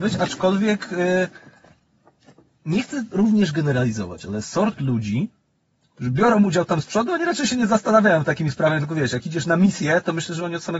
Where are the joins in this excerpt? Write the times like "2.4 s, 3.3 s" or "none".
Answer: none